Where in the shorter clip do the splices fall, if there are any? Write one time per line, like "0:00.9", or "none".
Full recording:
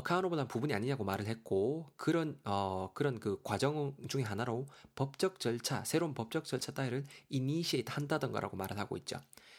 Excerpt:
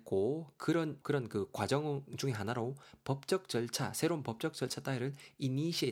0:01.0